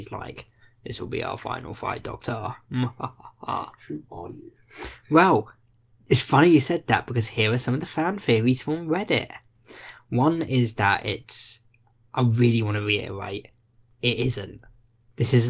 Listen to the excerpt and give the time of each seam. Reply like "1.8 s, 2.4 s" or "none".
12.0 s